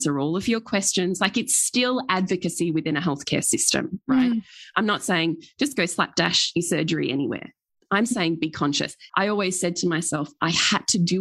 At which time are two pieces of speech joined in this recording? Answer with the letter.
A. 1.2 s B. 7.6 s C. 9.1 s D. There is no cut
C